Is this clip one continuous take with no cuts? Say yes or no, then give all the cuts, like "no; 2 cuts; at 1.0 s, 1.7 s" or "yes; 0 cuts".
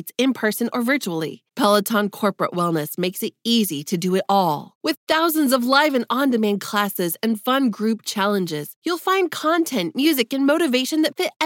yes; 0 cuts